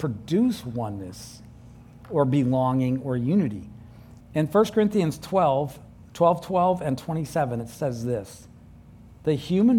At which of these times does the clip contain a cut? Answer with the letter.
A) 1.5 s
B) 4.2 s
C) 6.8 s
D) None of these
B